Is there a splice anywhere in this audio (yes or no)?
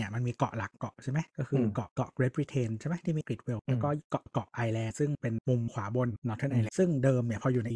no